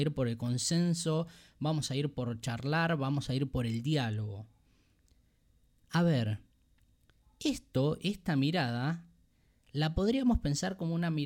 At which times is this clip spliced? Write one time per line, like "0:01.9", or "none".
none